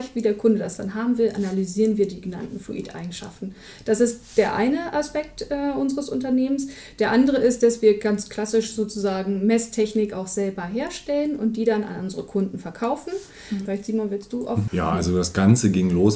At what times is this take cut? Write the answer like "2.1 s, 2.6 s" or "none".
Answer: 13.7 s, 14.7 s